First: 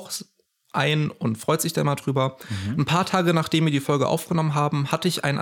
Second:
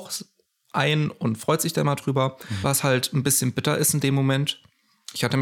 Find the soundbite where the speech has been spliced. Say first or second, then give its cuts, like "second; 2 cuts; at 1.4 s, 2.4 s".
second; 1 cut; at 2.6 s